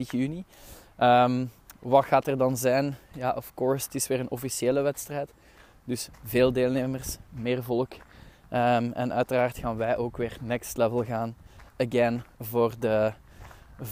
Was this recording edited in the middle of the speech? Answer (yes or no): no